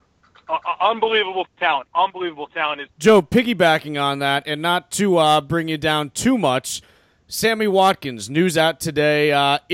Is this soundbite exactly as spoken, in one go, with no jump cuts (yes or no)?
no